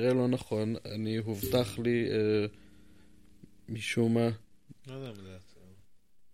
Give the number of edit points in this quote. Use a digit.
1